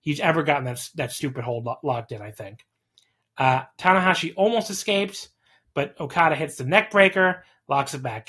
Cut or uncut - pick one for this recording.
uncut